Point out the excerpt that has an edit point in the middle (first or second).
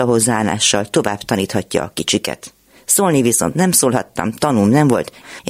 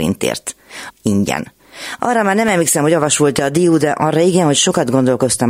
second